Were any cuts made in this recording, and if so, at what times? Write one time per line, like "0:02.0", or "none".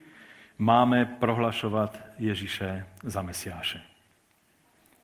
none